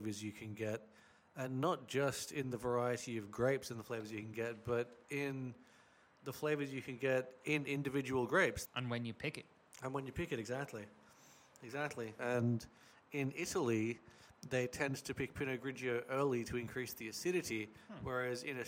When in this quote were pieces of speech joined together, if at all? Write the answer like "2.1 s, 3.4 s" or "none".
8.7 s, 12.2 s